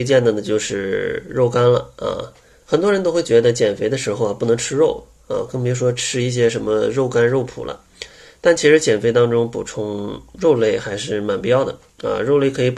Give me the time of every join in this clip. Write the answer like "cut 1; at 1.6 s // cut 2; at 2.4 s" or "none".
cut 1; at 2.6 s